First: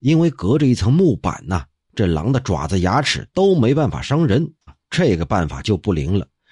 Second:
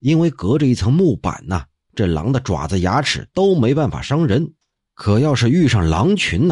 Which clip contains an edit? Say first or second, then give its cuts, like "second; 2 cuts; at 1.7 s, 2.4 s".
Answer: first; 1 cut; at 4.7 s